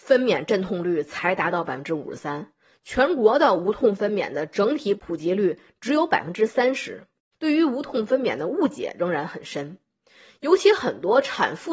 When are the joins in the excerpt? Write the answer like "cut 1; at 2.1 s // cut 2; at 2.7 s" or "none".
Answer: cut 1; at 7.3 s